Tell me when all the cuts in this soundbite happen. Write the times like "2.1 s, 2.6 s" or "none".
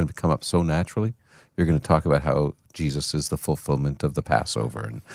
none